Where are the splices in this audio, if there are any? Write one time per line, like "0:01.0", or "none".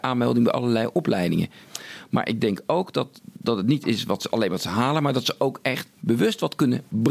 none